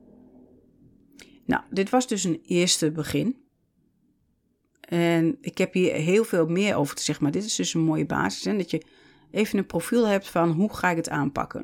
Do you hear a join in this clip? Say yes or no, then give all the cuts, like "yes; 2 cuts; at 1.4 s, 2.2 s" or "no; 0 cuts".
yes; 1 cut; at 5.4 s